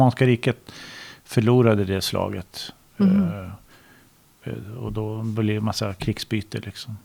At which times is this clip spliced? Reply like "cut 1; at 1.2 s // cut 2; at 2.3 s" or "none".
none